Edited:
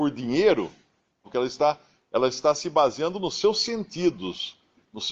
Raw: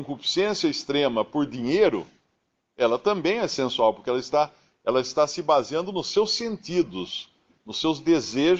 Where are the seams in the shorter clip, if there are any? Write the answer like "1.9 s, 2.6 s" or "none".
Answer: 1.2 s